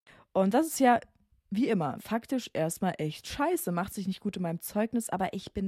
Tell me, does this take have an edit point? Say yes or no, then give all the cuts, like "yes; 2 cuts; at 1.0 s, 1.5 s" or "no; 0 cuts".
yes; 1 cut; at 2.0 s